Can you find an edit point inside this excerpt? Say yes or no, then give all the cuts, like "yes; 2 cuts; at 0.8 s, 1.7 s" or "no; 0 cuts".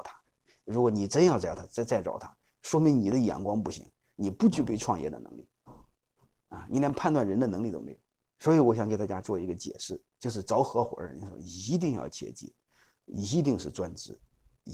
no; 0 cuts